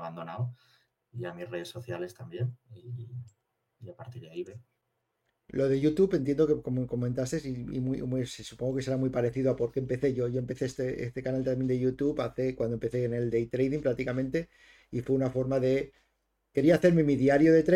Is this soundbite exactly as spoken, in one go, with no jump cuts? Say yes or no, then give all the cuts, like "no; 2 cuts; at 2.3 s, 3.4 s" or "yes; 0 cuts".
yes; 0 cuts